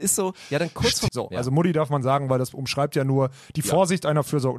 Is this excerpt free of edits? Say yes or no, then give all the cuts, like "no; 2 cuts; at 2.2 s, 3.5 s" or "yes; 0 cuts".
no; 1 cut; at 1.1 s